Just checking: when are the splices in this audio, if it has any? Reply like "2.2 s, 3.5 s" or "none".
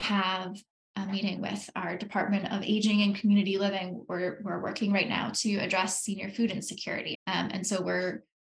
7.1 s